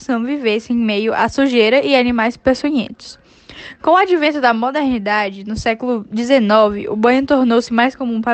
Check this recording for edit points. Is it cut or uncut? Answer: uncut